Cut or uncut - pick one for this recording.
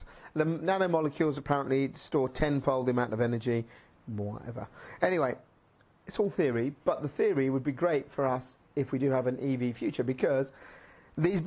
uncut